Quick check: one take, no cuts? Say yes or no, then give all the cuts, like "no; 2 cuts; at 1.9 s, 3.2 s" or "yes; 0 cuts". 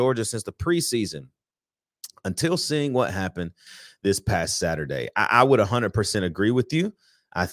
yes; 0 cuts